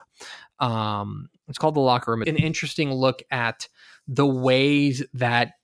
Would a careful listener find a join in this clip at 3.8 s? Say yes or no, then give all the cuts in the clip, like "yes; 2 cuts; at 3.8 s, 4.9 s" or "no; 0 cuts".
no; 1 cut; at 2.2 s